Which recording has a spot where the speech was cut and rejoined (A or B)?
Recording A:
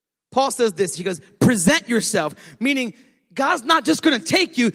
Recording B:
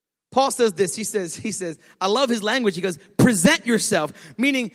A